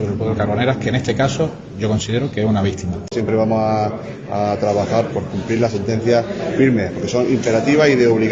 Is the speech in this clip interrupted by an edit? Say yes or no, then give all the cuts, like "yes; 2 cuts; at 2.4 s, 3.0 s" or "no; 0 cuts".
yes; 1 cut; at 5.1 s